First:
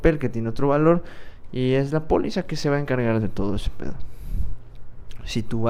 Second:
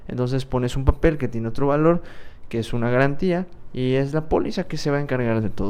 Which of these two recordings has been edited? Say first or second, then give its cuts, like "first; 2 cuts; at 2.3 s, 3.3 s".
first; 1 cut; at 1.5 s